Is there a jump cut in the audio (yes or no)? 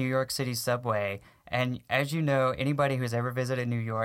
no